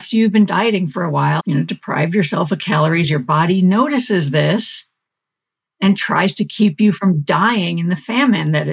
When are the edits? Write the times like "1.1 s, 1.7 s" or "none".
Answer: 1.4 s